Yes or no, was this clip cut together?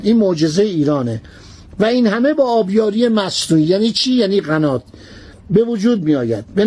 no